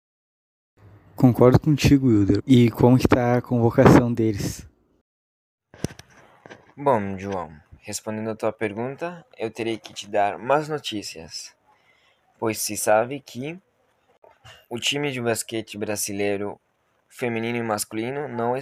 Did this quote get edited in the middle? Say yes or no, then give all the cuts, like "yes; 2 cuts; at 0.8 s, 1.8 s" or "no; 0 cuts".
yes; 1 cut; at 2.4 s